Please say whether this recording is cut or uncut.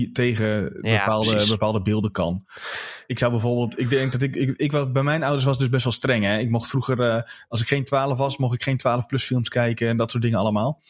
uncut